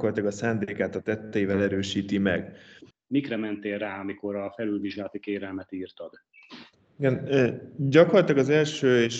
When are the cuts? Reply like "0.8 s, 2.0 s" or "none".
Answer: 2.9 s